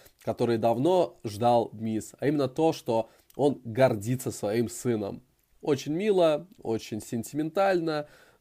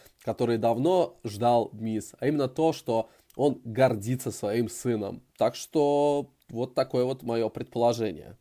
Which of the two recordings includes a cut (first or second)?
second